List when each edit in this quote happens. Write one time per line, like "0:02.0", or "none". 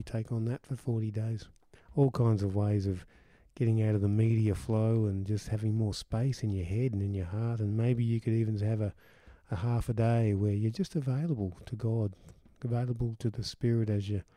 0:01.7